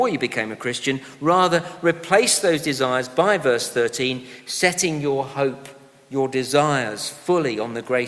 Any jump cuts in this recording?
no; 0 cuts

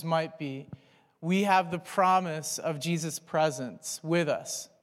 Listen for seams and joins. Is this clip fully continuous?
yes; 0 cuts

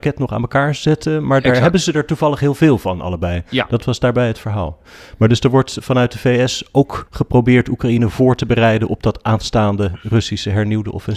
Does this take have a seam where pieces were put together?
no; 0 cuts

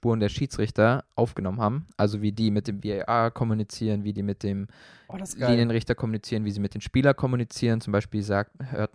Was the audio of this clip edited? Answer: no; 0 cuts

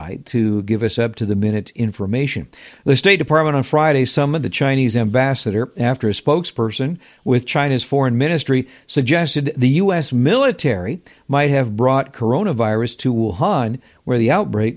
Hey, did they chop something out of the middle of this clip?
yes; 1 cut; at 2.7 s

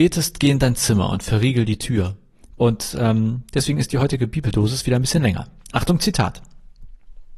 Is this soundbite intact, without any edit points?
no; 1 cut; at 2.6 s

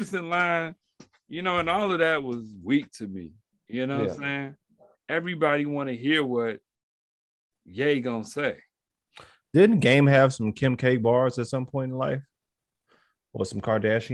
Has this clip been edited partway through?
yes; 1 cut; at 4.9 s

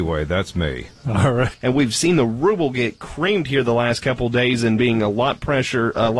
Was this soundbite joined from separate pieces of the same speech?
yes; 1 cut; at 1.5 s

